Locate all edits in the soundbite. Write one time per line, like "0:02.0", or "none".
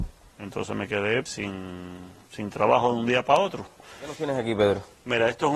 0:01.3